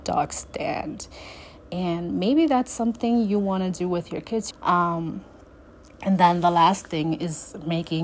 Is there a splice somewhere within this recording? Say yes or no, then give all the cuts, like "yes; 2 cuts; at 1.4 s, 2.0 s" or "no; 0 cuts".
yes; 1 cut; at 4.5 s